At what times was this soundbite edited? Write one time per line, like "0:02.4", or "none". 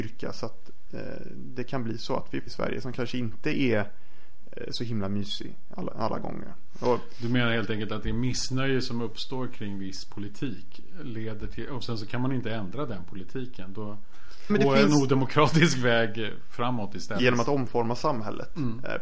0:02.5
0:14.5
0:17.2